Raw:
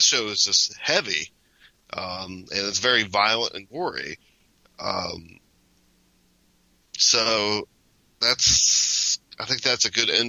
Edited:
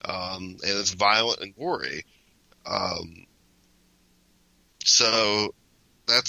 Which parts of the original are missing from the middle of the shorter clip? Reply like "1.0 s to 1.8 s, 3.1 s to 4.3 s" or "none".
2.8 s to 3.1 s